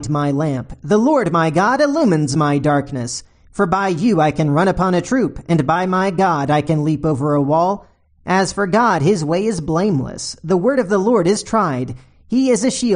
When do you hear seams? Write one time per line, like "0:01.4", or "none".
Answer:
none